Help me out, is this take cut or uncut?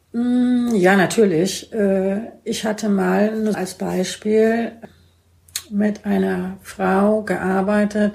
cut